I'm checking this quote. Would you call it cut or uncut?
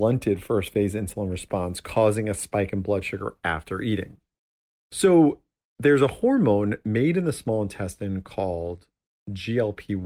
uncut